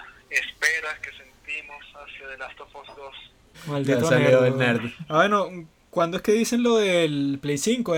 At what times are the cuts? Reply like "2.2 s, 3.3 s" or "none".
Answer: 3.5 s

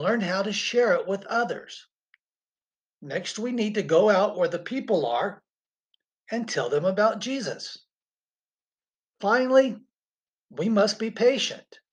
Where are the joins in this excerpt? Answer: none

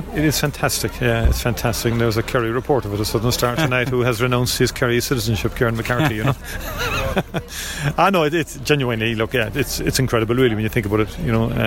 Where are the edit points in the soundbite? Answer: none

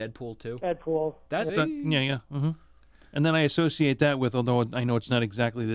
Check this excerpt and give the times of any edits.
1.5 s

